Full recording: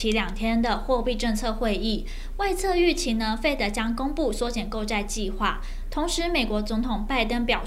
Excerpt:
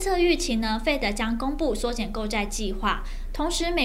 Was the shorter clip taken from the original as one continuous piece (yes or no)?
yes